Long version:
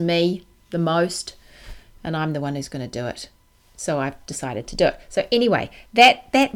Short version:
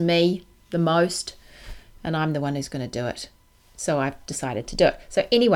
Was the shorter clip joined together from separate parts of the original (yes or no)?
no